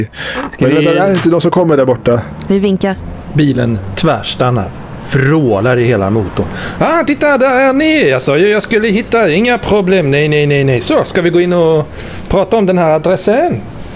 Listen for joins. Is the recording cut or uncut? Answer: uncut